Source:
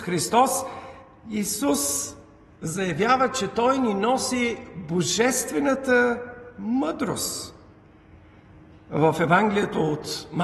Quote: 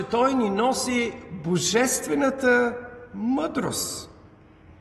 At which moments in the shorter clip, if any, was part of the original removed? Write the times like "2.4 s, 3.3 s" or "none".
none